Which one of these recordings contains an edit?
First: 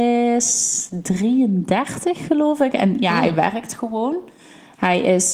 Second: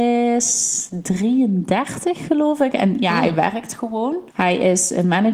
second; 1 cut; at 4.3 s

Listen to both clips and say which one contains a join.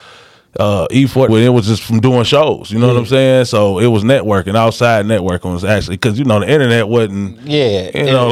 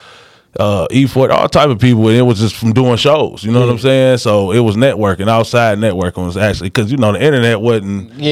first; 1 cut; at 1.3 s

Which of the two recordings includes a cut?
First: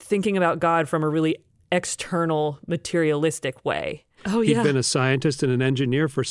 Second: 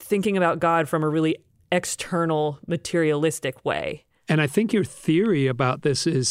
first; 1 cut; at 4.2 s

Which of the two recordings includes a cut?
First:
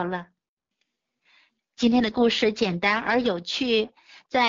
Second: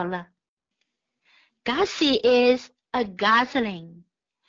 first; 1 cut; at 1.6 s

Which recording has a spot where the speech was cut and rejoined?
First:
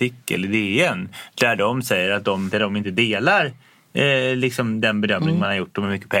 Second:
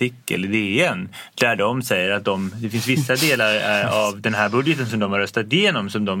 first; 1 cut; at 2.5 s

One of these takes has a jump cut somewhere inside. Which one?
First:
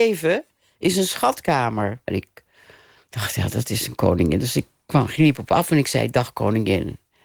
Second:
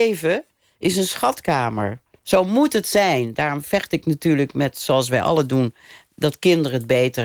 first; 1 cut; at 2.1 s

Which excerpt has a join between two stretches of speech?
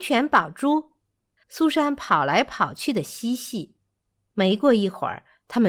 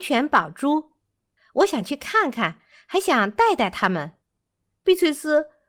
first; 1 cut; at 1.4 s

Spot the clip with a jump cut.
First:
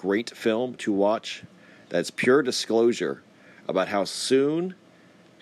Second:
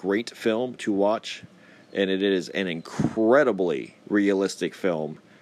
second; 2 cuts; at 1.8 s, 4.0 s

